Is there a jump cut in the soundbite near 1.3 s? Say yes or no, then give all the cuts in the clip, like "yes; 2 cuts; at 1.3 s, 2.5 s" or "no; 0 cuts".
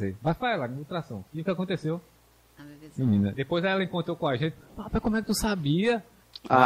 yes; 2 cuts; at 1.3 s, 3.3 s